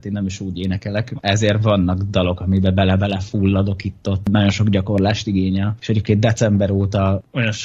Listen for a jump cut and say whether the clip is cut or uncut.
cut